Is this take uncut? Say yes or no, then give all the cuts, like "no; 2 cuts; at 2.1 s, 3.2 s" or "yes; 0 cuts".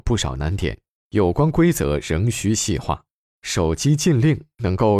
no; 1 cut; at 3.2 s